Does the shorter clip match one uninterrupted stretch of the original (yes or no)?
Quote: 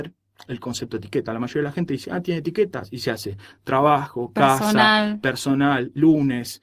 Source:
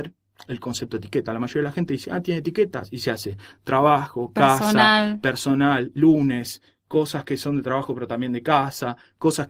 yes